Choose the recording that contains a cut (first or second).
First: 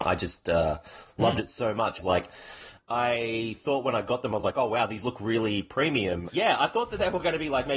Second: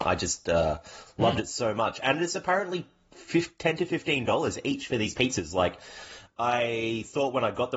first